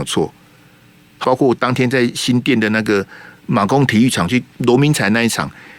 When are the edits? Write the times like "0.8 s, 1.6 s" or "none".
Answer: 1.2 s